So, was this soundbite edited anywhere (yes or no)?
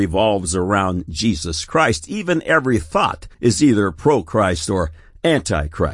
yes